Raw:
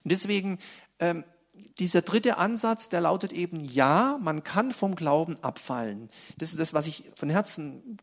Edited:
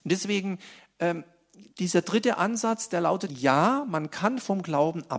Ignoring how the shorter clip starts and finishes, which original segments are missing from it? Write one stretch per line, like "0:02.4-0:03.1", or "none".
0:03.3-0:03.6